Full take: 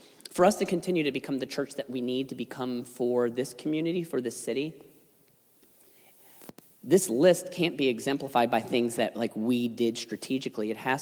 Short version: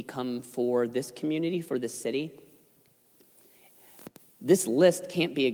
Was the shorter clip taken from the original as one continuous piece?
yes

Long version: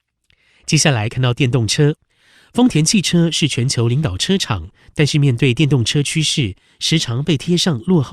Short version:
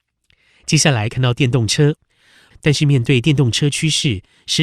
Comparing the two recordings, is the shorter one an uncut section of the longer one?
no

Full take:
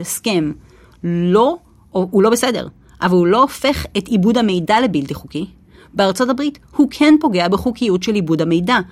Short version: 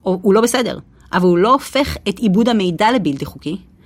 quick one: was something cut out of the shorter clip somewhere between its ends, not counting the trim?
no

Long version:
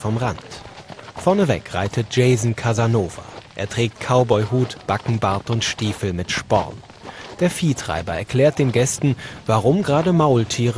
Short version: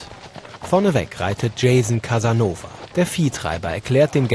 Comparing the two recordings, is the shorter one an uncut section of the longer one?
no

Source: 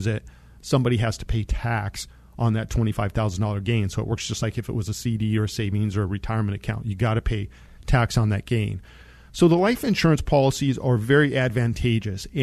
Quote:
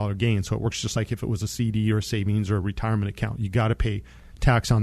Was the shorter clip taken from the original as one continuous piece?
yes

